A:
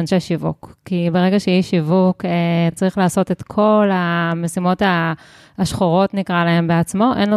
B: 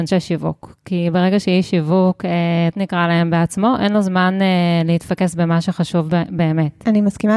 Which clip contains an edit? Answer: B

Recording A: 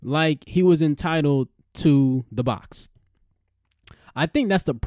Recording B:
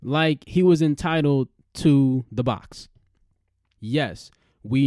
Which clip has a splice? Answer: B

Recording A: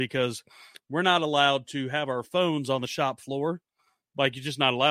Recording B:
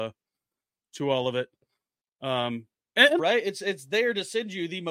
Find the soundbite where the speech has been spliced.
B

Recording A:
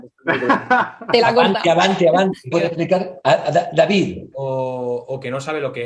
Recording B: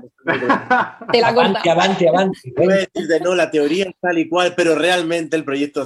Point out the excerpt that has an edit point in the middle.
A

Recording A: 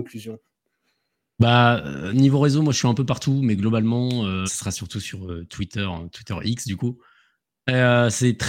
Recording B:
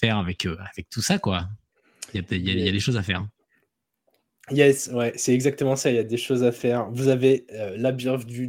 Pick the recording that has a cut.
A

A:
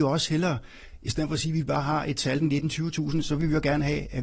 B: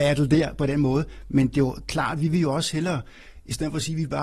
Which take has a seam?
A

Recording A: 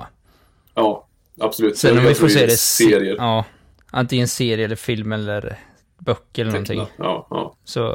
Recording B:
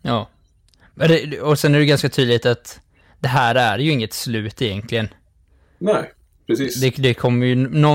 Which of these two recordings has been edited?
A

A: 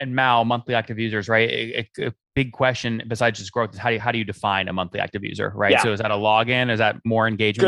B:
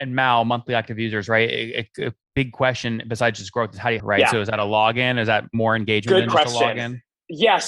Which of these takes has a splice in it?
B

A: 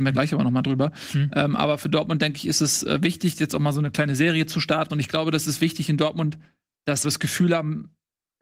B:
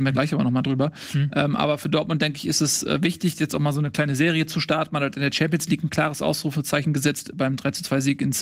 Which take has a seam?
A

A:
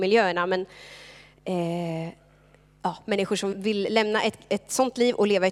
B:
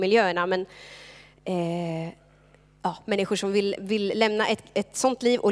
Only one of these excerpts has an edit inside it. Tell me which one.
A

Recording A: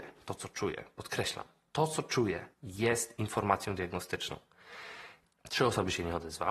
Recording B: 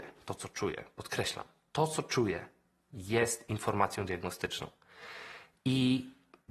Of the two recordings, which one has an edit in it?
A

